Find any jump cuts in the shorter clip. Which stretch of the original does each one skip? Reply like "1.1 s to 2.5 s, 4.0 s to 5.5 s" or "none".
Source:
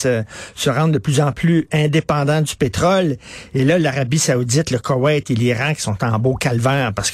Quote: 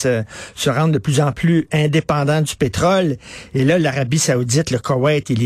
none